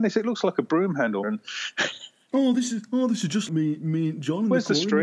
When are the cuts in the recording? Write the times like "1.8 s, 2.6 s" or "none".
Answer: 1.2 s, 3.5 s